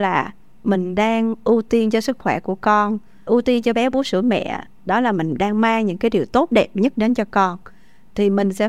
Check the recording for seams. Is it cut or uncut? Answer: cut